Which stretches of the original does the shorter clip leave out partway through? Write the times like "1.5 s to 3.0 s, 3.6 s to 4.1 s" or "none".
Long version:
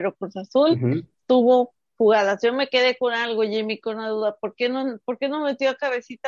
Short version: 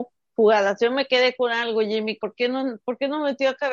3.8 s to 4.4 s

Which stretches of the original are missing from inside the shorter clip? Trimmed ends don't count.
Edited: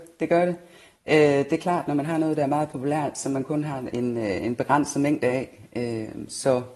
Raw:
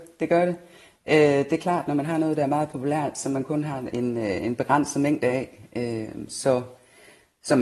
none

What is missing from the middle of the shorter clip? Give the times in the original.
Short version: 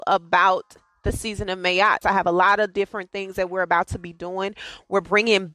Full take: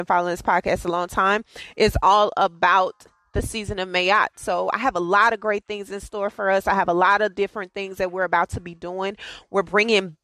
4.3 s to 6.6 s

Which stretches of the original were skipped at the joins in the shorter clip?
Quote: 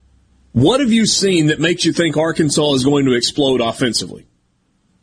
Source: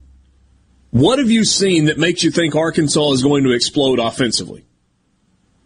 none

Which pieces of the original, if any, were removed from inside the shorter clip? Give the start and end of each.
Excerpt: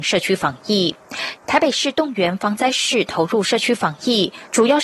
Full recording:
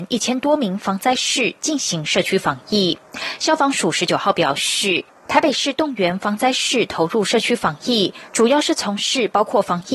3.4 s to 5.2 s

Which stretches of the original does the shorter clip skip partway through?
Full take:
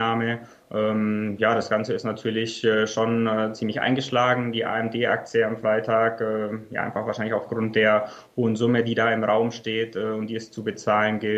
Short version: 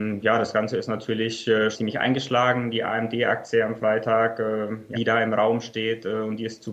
2.9 s to 3.5 s, 6.7 s to 8.8 s

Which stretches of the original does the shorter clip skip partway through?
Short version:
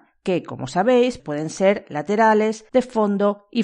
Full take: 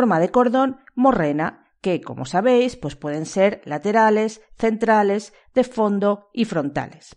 2.8 s to 3.0 s, 4.4 s to 5.5 s

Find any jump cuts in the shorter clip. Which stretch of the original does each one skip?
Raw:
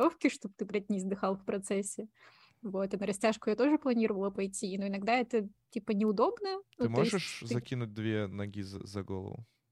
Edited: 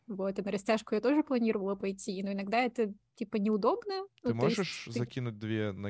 none

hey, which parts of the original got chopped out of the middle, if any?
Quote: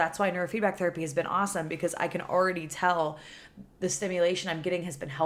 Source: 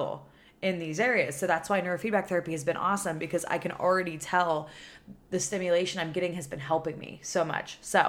none

